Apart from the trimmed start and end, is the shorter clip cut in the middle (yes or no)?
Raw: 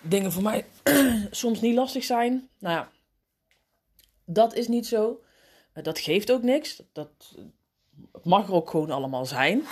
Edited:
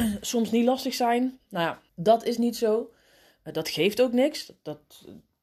yes